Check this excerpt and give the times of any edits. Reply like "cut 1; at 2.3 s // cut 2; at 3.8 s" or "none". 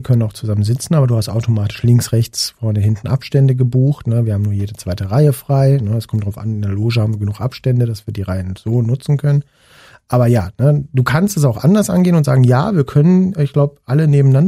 none